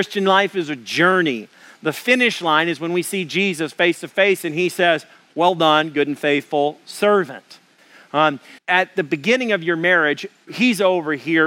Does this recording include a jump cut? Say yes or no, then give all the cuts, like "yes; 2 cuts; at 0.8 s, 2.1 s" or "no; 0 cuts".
yes; 2 cuts; at 8.6 s, 10.5 s